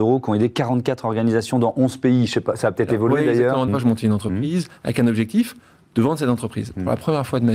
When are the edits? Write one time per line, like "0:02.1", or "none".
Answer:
0:03.7